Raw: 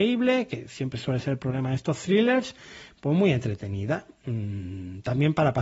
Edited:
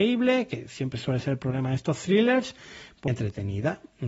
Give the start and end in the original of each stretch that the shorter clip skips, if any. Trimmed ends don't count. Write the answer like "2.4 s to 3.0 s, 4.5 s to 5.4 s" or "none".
3.1 s to 3.3 s